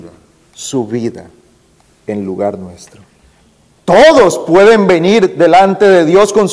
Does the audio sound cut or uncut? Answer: cut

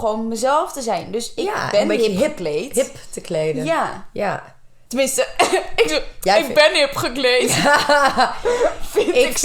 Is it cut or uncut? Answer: uncut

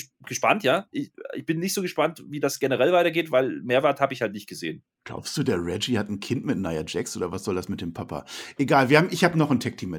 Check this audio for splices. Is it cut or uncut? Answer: uncut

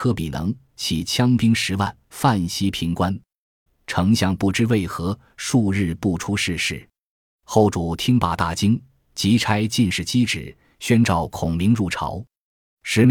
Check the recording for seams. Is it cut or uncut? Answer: cut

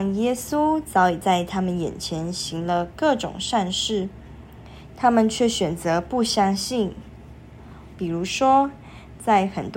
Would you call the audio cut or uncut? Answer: cut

